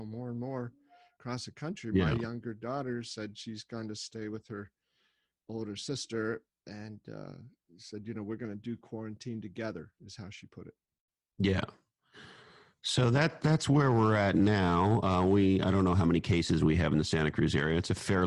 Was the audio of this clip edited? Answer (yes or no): no